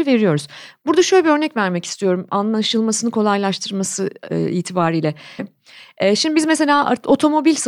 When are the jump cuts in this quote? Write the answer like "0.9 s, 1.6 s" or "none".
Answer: 5.4 s

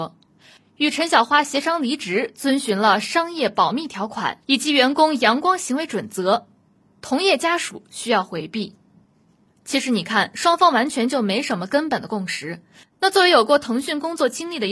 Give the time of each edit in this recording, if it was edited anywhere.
12.8 s

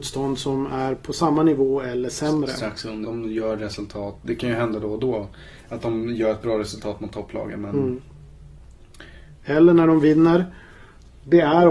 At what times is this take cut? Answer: 3.0 s, 9.4 s

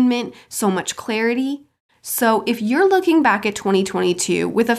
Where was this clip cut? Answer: 1.9 s

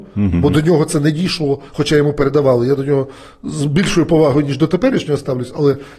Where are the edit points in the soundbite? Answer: none

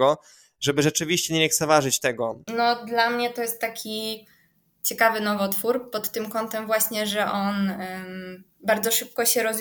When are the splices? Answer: 2.5 s

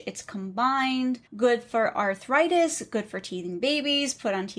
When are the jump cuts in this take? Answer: 1.3 s

